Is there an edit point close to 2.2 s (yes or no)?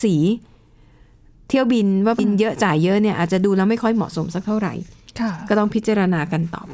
yes